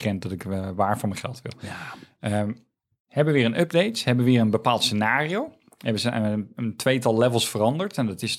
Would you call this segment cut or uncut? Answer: uncut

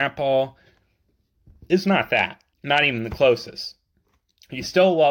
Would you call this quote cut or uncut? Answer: cut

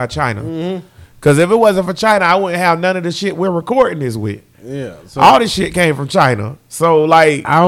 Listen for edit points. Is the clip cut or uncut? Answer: uncut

